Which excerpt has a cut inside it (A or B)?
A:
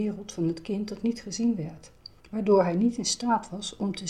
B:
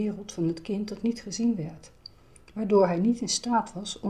A